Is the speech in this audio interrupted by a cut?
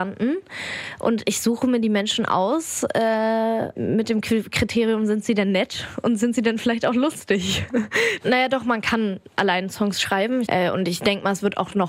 yes; 2 cuts; at 8.2 s, 10.4 s

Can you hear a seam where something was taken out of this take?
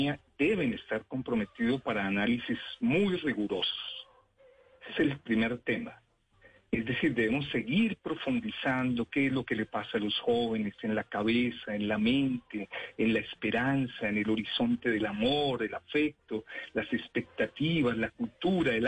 no; 0 cuts

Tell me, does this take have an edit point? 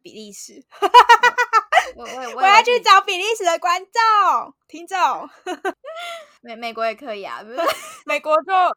no; 0 cuts

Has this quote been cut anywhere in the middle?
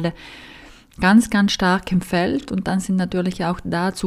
no; 0 cuts

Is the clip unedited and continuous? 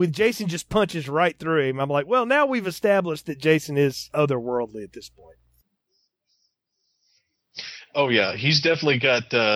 yes; 0 cuts

